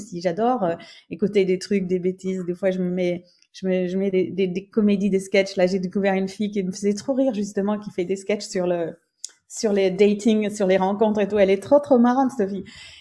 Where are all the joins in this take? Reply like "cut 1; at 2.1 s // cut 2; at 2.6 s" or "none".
none